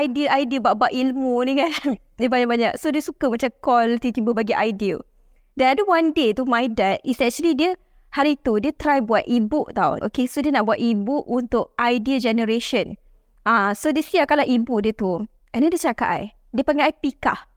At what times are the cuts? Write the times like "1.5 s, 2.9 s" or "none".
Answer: 10.0 s